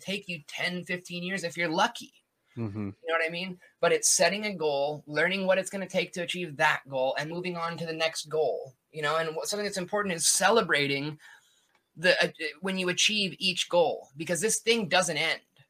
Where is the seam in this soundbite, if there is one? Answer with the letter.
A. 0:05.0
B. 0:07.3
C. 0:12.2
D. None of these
B